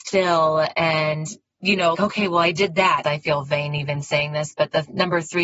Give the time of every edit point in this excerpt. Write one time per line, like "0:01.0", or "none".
0:01.9
0:03.0